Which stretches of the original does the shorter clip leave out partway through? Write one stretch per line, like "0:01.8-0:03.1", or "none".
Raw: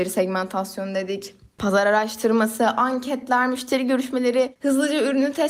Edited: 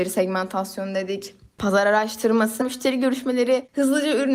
0:02.6-0:03.5

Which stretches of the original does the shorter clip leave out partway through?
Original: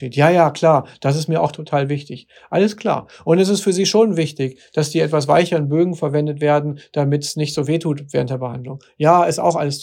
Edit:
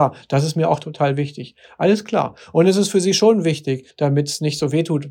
0:04.6-0:06.9

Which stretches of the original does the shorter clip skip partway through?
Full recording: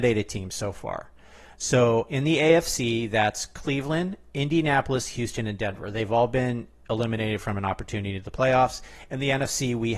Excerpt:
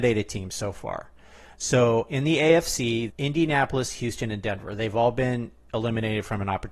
0:03.1-0:04.3

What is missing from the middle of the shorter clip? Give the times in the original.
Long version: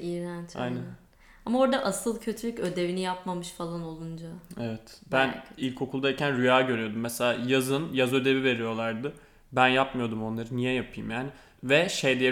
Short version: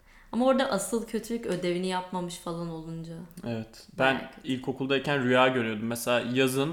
none

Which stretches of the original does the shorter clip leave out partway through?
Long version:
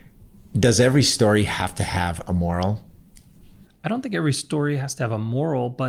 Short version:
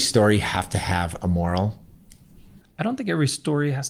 none

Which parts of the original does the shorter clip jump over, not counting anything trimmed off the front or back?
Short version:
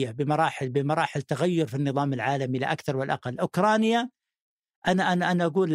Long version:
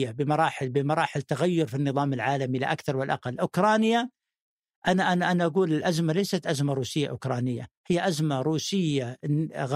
none

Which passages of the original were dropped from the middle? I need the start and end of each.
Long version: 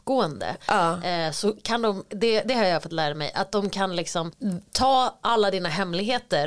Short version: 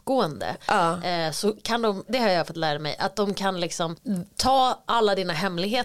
0:02.1-0:02.4

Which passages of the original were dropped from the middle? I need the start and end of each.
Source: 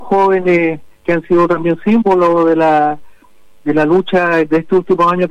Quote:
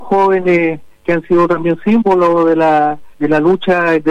0:03.1-0:03.6

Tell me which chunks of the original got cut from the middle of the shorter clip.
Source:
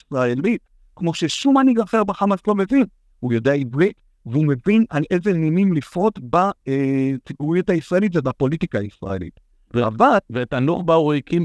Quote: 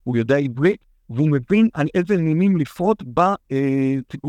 none

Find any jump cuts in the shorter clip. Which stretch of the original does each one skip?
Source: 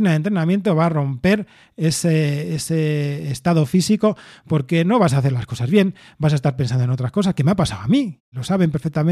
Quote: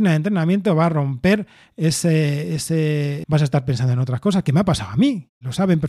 0:03.2-0:06.1

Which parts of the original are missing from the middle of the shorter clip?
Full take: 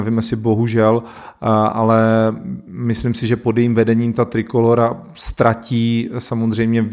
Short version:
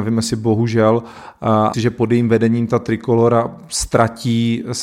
0:01.7-0:03.2

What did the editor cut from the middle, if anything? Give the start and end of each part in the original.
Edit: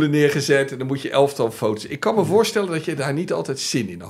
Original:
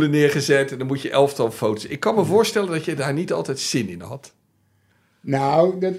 none

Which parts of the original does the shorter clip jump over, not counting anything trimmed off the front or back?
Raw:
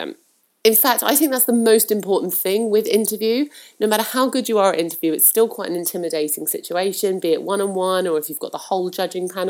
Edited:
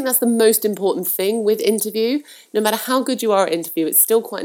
none

